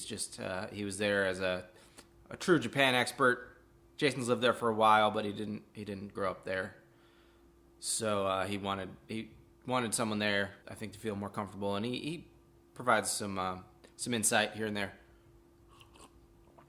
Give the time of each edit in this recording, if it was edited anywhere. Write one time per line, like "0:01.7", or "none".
0:10.6